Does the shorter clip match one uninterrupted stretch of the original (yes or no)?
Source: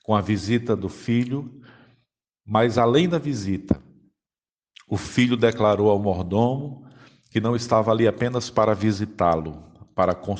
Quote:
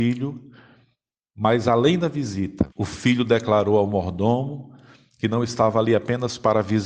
no